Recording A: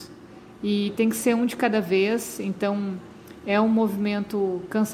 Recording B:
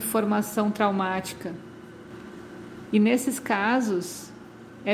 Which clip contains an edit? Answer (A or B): B